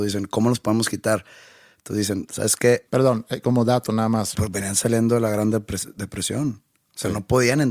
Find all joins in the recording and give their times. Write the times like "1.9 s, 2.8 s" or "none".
2.9 s, 4.3 s